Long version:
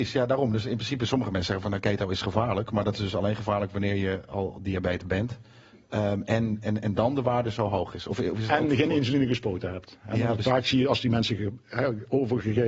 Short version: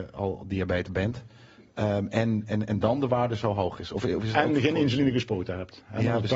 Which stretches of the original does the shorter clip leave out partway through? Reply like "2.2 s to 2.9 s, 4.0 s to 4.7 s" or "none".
none